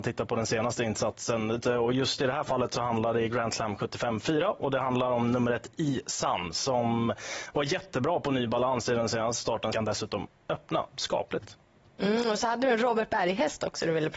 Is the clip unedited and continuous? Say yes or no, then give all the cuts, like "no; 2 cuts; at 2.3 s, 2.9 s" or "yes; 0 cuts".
no; 2 cuts; at 1.6 s, 9.7 s